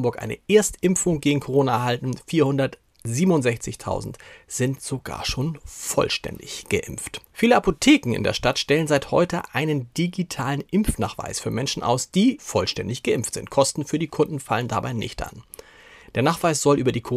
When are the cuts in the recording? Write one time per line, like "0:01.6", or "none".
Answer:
0:07.2
0:12.4